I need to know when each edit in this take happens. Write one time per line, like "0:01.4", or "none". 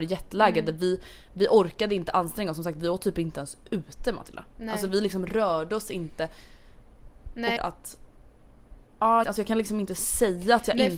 0:07.6
0:09.2